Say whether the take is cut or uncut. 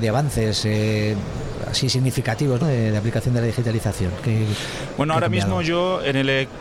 cut